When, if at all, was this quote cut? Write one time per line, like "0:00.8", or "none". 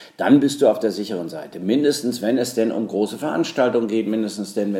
none